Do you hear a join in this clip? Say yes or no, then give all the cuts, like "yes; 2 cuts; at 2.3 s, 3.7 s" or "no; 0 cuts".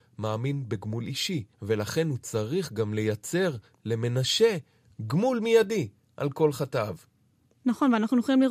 yes; 1 cut; at 1.5 s